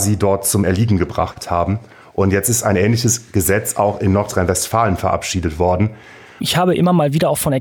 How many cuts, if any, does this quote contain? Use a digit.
1